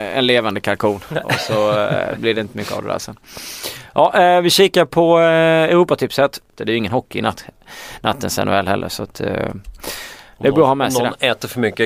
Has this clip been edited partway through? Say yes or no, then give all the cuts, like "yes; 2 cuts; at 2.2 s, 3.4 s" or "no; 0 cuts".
yes; 1 cut; at 6.6 s